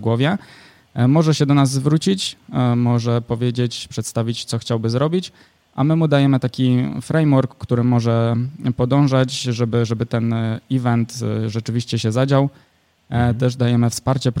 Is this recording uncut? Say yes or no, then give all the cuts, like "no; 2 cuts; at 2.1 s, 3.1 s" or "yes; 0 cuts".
yes; 0 cuts